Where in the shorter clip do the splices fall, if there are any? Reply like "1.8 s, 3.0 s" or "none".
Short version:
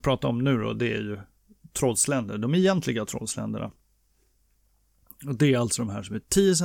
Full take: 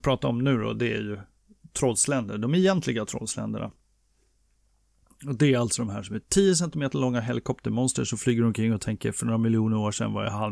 none

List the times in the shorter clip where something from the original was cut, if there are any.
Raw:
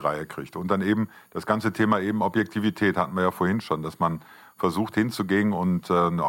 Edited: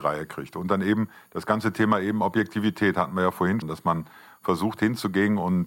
3.6 s

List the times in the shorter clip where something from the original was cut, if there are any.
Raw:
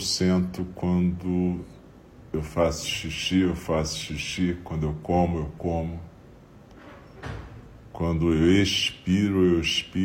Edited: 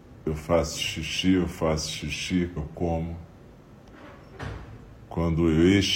2.6 s

